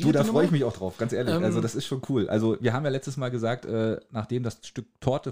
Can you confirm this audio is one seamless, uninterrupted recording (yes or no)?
yes